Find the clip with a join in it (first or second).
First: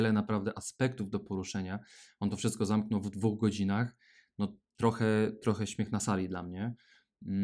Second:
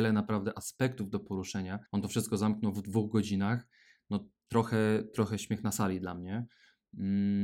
second